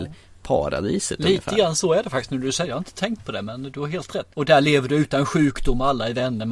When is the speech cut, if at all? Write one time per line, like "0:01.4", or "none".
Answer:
0:04.3